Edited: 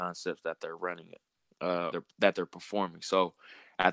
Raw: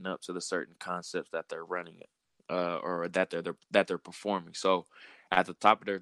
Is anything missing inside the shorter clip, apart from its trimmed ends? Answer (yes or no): yes